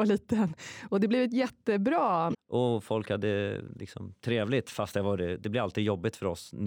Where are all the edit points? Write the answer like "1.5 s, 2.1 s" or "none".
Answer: 2.3 s